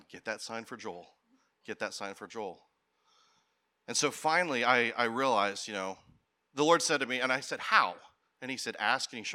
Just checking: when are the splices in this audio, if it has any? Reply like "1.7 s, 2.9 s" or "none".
none